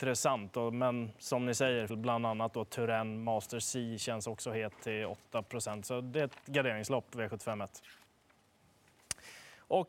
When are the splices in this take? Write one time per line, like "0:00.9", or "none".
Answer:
0:01.9

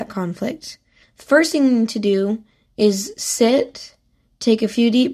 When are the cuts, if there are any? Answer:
0:01.0

